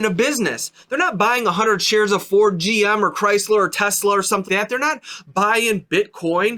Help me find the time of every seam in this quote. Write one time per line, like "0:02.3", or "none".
0:04.5